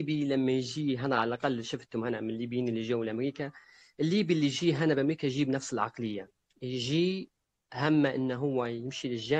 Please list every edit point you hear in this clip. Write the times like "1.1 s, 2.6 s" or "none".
none